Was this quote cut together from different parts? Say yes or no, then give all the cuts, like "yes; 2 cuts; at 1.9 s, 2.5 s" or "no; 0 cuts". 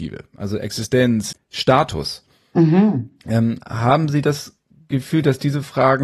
yes; 1 cut; at 1.3 s